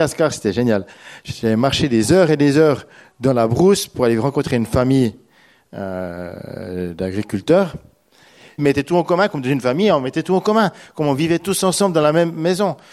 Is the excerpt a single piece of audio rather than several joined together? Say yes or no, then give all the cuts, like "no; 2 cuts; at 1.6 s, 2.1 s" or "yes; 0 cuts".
no; 1 cut; at 8.6 s